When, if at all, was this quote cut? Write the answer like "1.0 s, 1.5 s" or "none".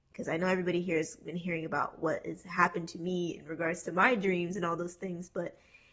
none